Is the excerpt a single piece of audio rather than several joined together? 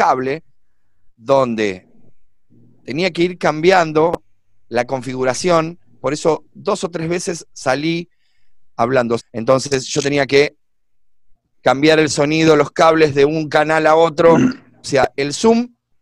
no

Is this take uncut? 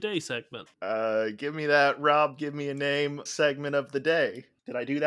no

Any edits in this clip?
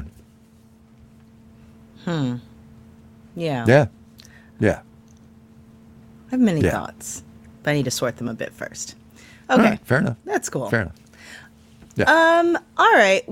no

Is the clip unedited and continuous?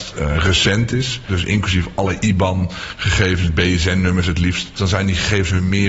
no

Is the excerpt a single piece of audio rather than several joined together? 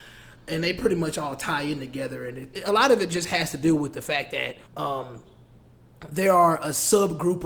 no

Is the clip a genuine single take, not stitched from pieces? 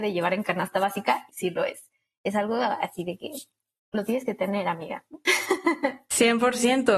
no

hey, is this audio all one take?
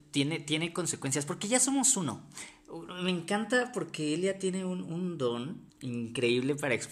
no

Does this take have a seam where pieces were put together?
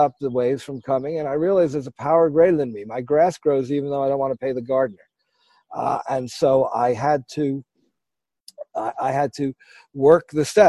no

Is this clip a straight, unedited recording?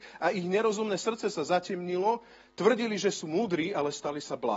yes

